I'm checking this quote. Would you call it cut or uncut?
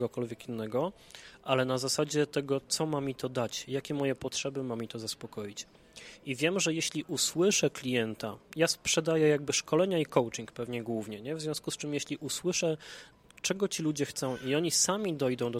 uncut